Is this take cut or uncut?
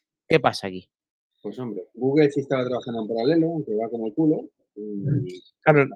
uncut